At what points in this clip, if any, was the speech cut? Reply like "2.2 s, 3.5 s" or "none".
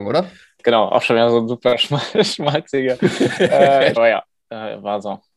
4.0 s